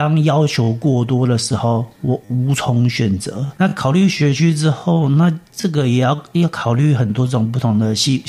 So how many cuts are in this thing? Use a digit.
1